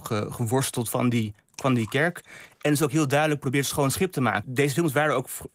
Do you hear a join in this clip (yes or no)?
yes